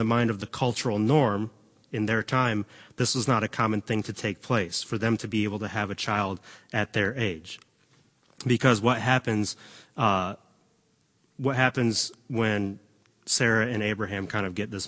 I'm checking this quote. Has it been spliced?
no; 0 cuts

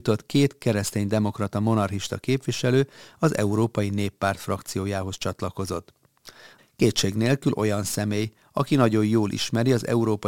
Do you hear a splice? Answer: yes; 1 cut; at 6.6 s

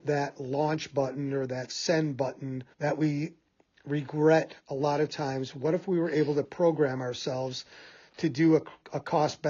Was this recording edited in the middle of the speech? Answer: yes; 1 cut; at 2.7 s

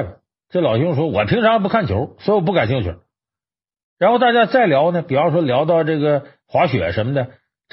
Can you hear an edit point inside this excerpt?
no; 0 cuts

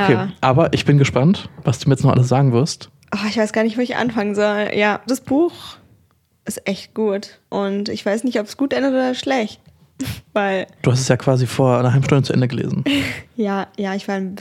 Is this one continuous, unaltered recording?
no; 2 cuts; at 5.1 s, 7.5 s

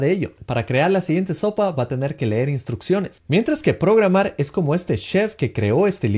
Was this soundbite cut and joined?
no; 0 cuts

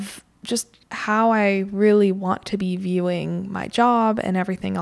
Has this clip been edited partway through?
no; 0 cuts

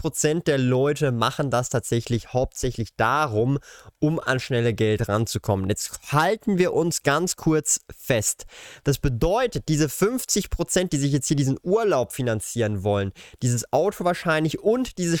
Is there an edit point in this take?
yes; 1 cut; at 8.8 s

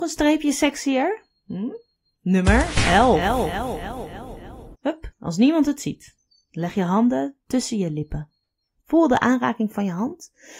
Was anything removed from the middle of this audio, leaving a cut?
yes; 2 cuts; at 4.7 s, 8.8 s

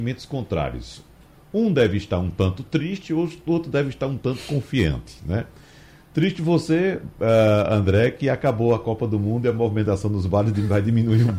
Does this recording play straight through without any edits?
yes; 0 cuts

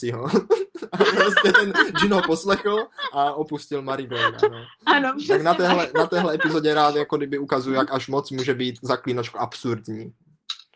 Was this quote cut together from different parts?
no; 0 cuts

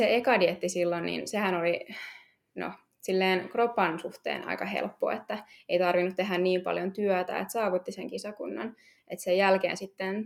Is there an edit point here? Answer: no; 0 cuts

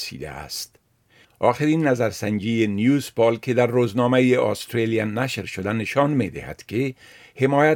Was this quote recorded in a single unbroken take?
no; 1 cut; at 1.2 s

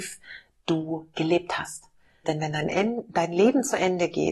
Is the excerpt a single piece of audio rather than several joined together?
no; 1 cut; at 2.2 s

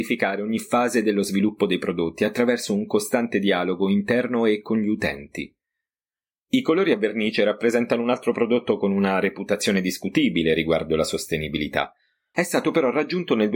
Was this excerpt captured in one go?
no; 1 cut; at 12.3 s

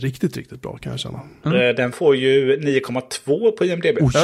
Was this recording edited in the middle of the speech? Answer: yes; 1 cut; at 1.4 s

